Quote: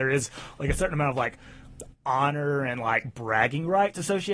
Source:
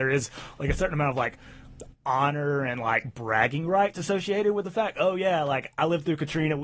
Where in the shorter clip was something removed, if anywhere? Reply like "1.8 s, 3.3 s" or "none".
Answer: none